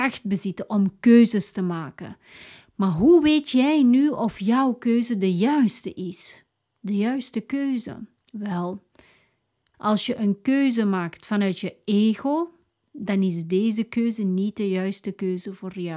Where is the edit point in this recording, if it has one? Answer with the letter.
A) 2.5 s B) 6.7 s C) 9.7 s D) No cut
C